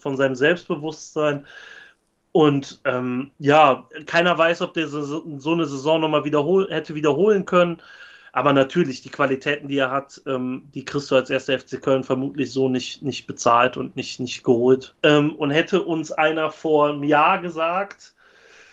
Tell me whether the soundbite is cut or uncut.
cut